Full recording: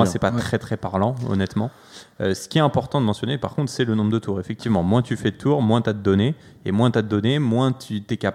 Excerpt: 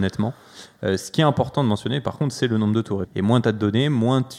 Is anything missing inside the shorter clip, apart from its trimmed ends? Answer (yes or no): yes